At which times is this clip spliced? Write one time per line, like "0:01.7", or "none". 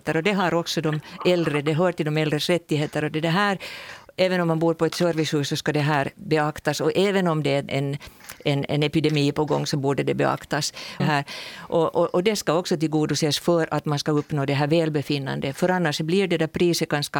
0:07.7
0:11.0